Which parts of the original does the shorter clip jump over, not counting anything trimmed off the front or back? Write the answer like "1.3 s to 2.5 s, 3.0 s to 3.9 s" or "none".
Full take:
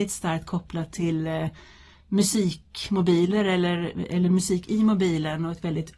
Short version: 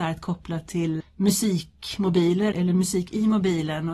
1.2 s to 1.9 s, 3.4 s to 4.1 s